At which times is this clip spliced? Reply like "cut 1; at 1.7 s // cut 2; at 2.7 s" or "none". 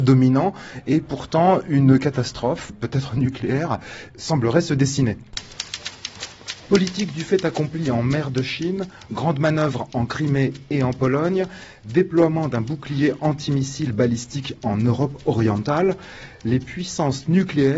cut 1; at 2.7 s

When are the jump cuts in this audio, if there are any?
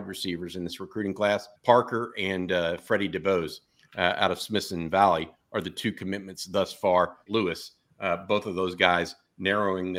cut 1; at 1.6 s // cut 2; at 7.3 s

